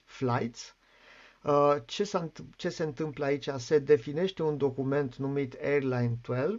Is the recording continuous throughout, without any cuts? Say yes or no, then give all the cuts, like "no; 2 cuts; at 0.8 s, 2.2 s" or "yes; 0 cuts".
yes; 0 cuts